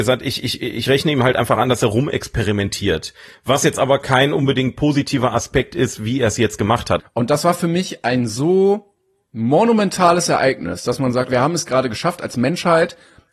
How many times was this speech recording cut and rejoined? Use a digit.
2